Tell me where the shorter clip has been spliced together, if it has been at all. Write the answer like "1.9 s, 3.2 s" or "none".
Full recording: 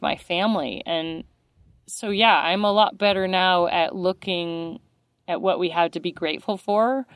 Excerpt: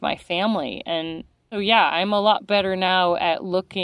1.5 s